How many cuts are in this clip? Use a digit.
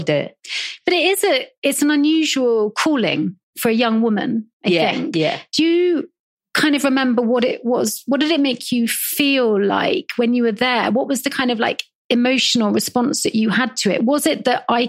0